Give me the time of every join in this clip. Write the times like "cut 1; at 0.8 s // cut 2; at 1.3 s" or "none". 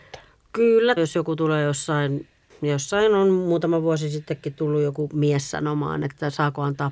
cut 1; at 1.0 s